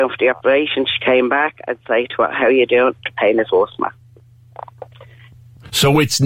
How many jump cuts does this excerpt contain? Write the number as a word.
zero